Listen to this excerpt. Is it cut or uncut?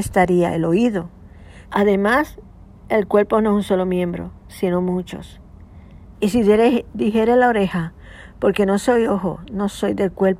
cut